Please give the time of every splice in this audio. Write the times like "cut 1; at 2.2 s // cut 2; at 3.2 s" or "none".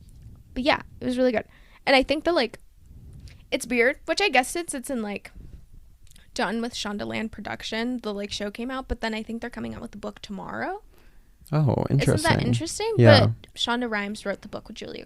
cut 1; at 13.5 s